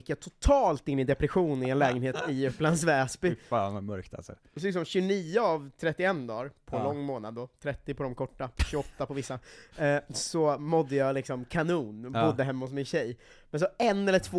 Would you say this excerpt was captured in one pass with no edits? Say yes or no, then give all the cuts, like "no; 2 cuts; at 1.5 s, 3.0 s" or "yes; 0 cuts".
yes; 0 cuts